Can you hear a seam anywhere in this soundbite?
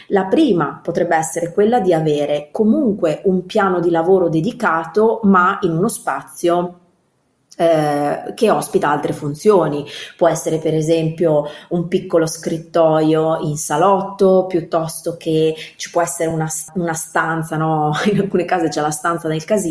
no; 0 cuts

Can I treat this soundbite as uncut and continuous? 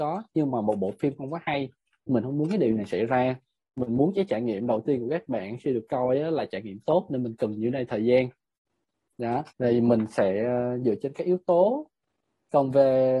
no; 1 cut; at 9.5 s

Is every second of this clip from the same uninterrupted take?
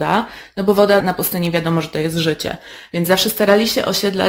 yes; 0 cuts

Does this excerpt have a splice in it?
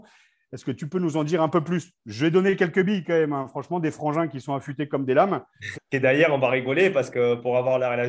yes; 1 cut; at 5.7 s

